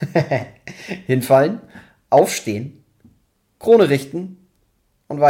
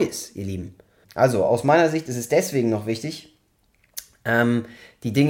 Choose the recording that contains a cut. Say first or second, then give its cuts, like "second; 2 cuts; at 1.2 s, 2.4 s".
second; 1 cut; at 1.0 s